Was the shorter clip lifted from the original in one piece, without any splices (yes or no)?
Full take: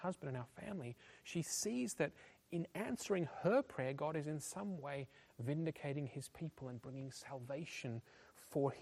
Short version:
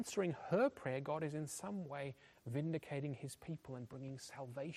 yes